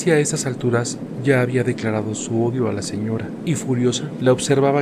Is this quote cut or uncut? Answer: uncut